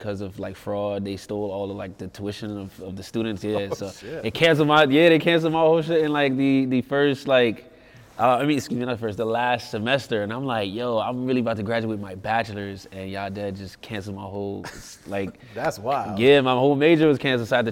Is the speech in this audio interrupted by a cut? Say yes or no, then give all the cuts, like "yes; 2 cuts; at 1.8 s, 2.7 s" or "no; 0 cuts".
no; 0 cuts